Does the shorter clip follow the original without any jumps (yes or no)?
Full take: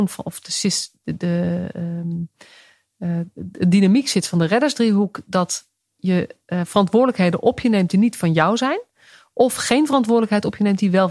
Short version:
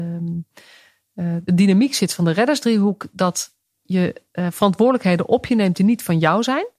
no